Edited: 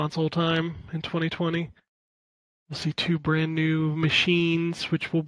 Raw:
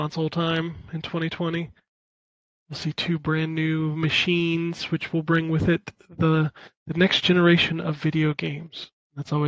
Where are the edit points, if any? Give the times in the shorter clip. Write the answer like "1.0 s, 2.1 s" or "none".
none

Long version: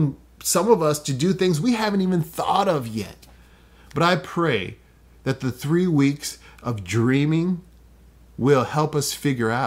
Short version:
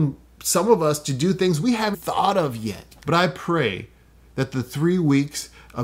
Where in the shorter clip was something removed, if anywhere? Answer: 1.9 s, 3.0 s

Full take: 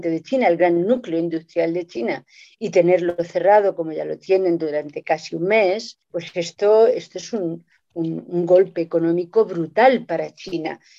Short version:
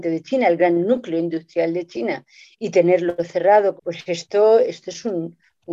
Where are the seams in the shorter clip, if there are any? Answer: 3.8 s

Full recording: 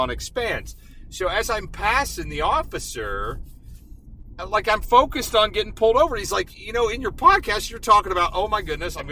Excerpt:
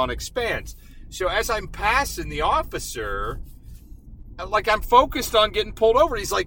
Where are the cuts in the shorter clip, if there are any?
none

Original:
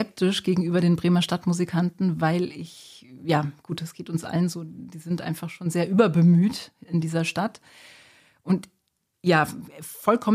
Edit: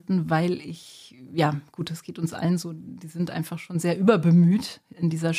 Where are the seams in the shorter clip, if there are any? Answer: none

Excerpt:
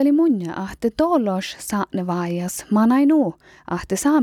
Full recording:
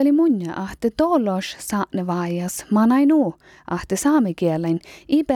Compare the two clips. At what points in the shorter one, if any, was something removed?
none

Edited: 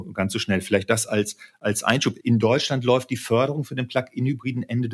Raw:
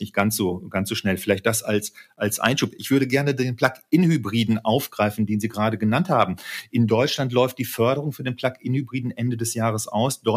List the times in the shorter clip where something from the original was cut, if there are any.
2.2 s

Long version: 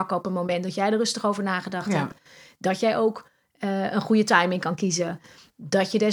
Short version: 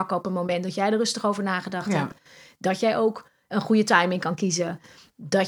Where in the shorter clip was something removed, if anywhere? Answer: 3.5 s

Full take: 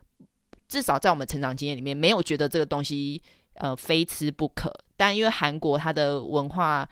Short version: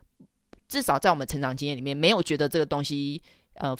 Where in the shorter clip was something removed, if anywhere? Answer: none

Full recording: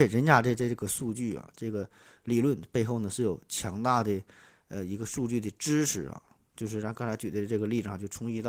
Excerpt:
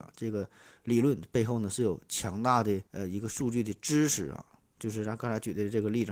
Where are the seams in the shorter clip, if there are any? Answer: 2.9 s

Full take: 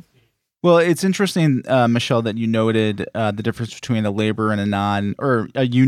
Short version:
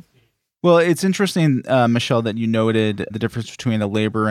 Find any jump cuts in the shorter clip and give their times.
3.1 s

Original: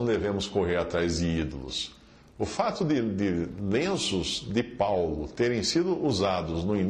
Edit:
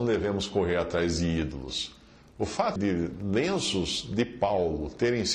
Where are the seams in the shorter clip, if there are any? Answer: 2.8 s

